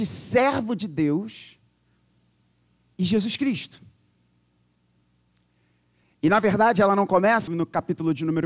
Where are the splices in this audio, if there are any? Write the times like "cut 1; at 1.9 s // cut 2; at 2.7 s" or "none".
cut 1; at 6.0 s // cut 2; at 7.5 s